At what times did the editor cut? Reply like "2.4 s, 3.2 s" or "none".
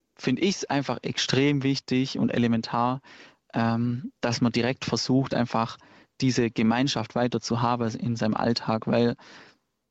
none